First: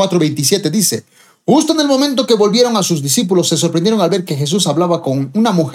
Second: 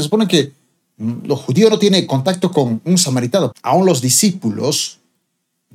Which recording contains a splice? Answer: second; 1 cut; at 3.5 s

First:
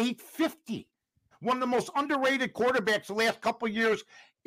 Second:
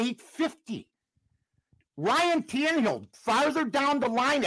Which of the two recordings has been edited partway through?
first; 1 cut; at 1.3 s

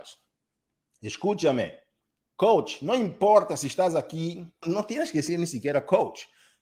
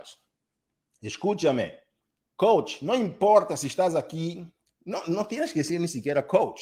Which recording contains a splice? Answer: first; 1 cut; at 4.6 s

